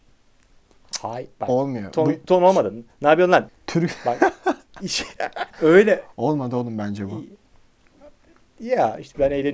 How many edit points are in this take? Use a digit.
2